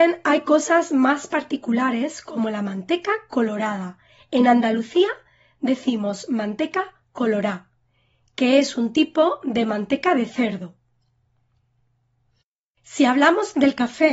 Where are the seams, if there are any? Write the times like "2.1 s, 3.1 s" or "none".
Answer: none